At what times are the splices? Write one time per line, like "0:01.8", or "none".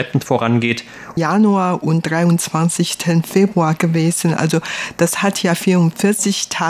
0:01.2